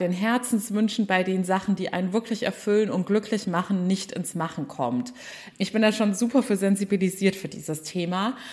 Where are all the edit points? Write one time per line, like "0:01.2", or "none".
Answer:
0:05.5